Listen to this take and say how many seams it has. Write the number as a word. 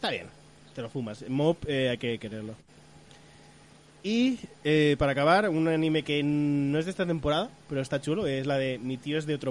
zero